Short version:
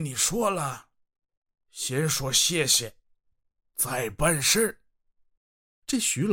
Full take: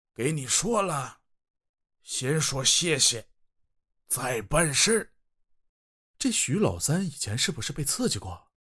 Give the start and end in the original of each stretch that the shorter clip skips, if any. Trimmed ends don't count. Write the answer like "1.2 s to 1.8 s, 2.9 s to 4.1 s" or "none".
none

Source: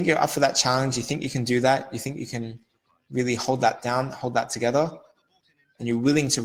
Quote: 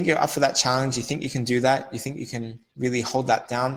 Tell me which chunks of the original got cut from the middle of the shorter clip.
2.7 s to 3.0 s

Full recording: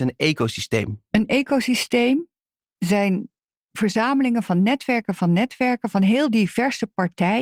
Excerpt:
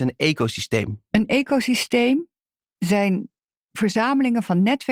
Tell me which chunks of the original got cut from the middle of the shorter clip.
none

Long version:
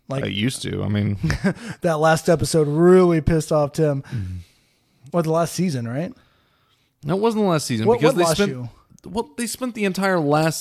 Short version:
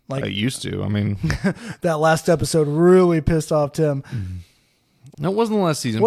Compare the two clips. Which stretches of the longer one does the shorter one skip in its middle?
5.1 s to 7.0 s

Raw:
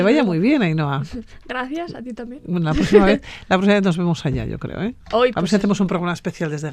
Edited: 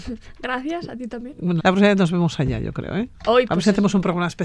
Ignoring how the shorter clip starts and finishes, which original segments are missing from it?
2.7 s to 3.5 s

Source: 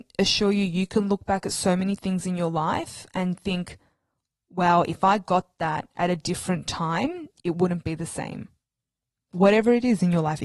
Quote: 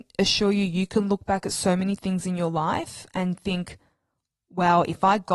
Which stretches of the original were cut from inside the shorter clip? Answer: none

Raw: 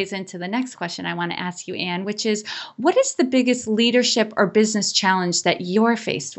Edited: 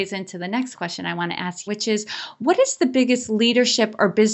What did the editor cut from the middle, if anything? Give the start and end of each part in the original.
1.7 s to 2.0 s

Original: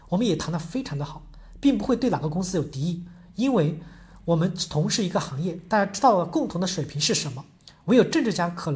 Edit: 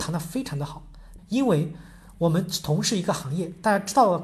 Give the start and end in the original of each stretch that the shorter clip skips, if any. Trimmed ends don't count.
1.6 s to 3.2 s

